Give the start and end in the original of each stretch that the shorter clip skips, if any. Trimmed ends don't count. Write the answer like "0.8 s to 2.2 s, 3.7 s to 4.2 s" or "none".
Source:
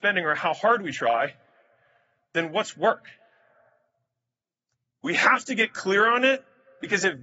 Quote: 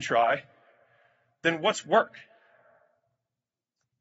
none